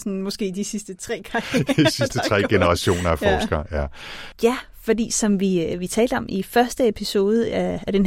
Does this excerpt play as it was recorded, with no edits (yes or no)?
no